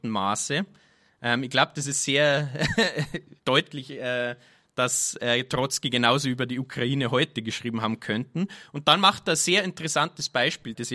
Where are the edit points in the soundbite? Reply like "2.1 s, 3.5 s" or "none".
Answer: none